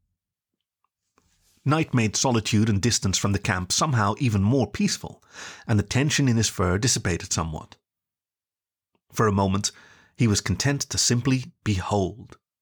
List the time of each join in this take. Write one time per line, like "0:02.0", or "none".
none

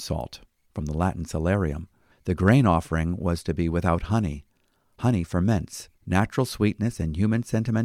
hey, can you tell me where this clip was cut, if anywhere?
0:02.1
0:06.0

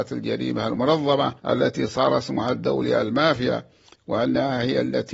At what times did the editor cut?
0:01.4

